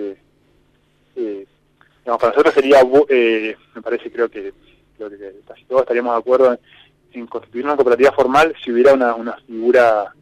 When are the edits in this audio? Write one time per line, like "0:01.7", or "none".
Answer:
none